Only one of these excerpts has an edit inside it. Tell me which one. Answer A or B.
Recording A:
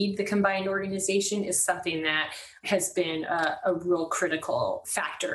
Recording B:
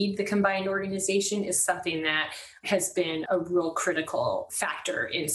B